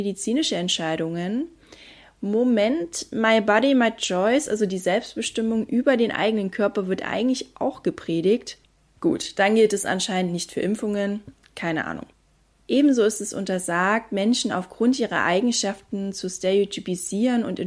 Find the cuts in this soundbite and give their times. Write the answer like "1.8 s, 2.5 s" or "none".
none

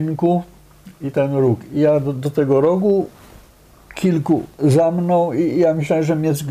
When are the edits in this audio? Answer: 1.1 s

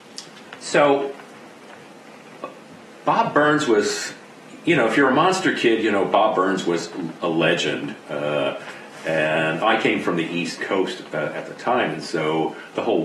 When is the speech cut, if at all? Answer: none

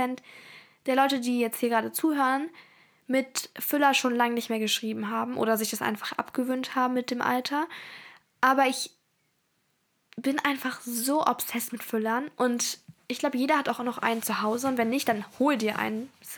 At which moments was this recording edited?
none

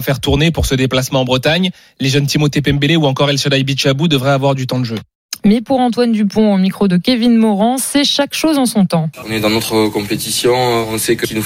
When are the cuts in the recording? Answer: 5.4 s, 9.2 s

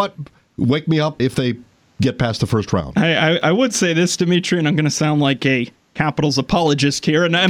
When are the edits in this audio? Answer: 1.2 s

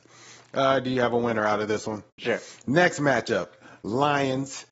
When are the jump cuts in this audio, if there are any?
2.2 s

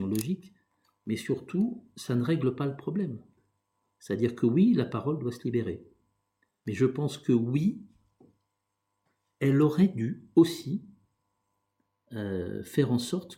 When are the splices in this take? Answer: none

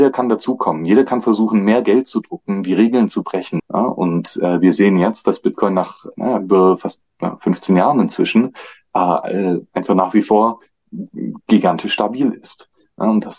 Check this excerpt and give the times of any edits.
3.6 s

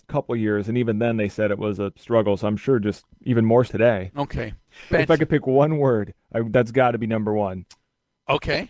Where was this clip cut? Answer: 3.7 s, 4.9 s

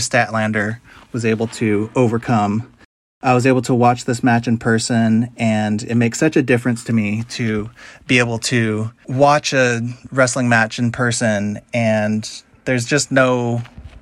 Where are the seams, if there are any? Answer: none

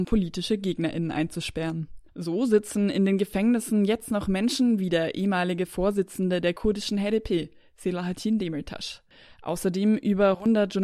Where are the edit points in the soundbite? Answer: 2.1 s

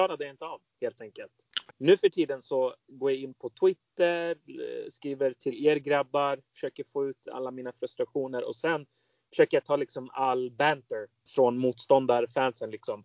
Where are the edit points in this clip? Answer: 1.7 s, 11.3 s

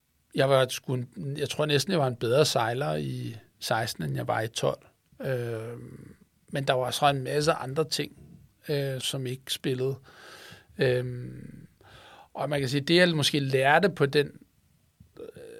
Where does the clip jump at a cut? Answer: 9.0 s

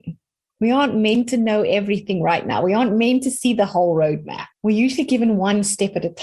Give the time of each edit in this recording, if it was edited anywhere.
4.5 s

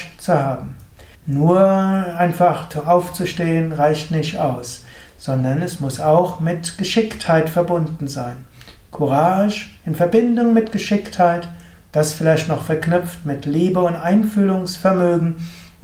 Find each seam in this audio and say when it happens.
1.1 s

